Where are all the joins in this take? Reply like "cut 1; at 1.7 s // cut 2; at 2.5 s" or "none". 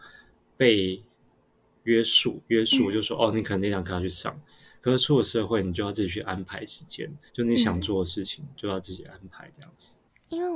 cut 1; at 2.5 s // cut 2; at 7.3 s